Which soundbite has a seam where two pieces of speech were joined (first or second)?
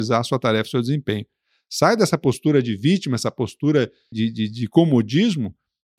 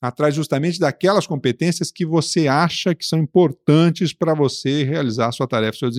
first